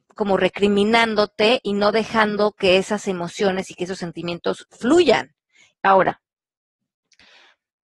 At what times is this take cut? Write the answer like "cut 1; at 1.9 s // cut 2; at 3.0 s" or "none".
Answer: cut 1; at 5.7 s